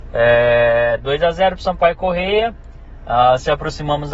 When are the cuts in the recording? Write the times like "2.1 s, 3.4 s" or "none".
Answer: none